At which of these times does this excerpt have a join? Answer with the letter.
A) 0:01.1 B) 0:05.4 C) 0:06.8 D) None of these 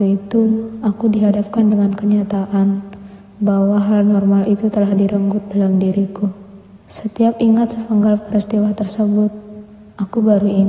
C